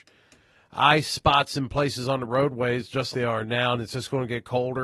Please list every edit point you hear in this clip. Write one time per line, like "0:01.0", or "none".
0:03.1